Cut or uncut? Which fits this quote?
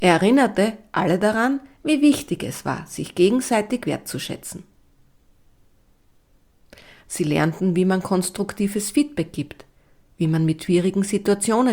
cut